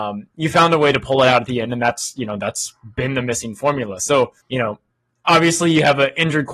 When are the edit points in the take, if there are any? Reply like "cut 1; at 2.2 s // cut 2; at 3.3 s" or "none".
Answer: cut 1; at 4.4 s